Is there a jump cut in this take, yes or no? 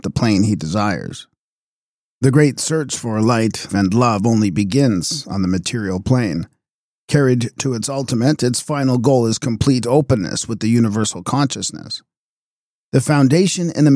yes